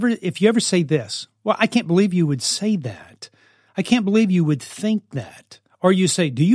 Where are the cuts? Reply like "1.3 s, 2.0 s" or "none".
none